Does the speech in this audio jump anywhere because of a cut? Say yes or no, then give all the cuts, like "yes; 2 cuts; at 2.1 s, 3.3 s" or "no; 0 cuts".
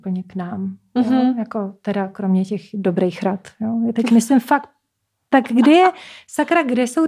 no; 0 cuts